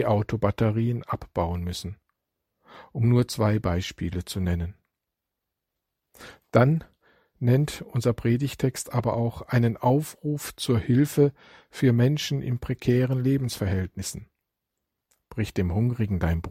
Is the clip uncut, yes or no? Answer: yes